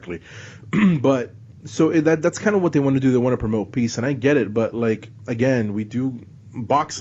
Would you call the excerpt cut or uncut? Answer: uncut